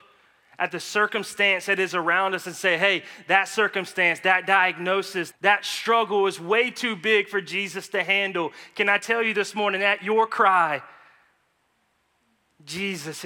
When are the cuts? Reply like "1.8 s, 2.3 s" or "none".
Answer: 5.3 s